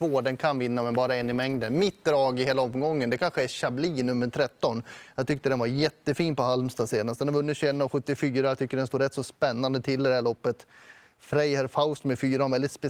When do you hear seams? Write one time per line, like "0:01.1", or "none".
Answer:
none